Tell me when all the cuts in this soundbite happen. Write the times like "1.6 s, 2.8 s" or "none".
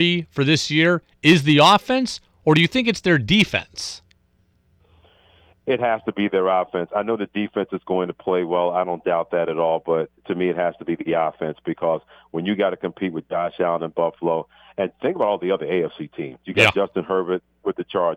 none